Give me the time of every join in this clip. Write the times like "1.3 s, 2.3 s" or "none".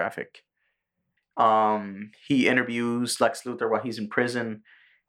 1.2 s